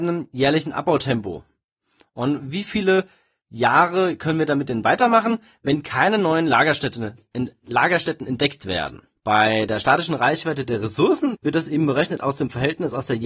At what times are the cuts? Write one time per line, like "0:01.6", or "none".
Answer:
0:09.2
0:11.3